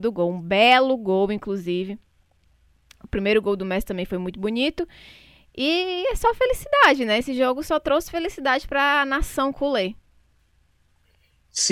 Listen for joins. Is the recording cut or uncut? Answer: uncut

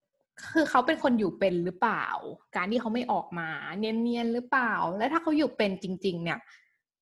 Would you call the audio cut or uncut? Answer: uncut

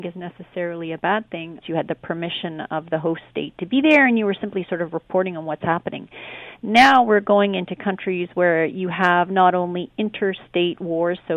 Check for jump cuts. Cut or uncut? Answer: cut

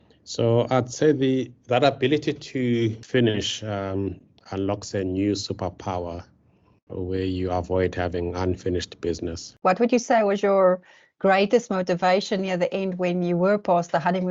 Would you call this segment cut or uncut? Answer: cut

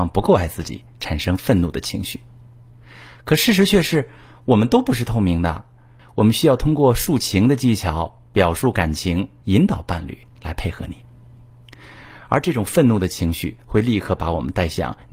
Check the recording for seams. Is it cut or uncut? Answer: cut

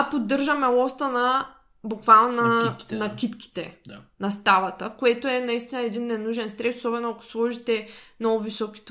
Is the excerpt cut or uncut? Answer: uncut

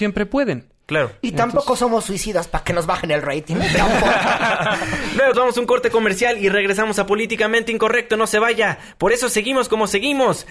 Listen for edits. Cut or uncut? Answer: cut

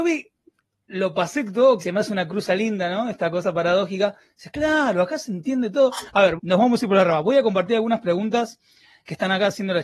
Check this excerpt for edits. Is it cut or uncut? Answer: cut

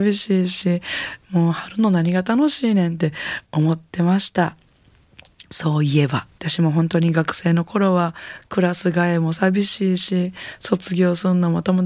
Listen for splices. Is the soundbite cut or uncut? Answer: cut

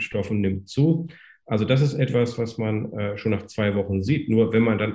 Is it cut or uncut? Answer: uncut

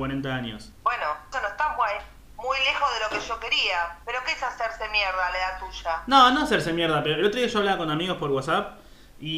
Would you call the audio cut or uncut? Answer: cut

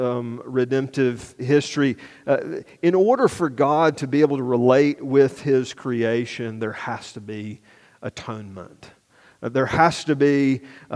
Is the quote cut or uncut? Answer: uncut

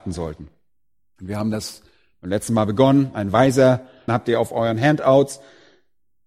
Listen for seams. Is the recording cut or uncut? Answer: cut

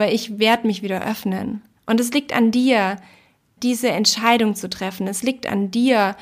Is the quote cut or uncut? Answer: cut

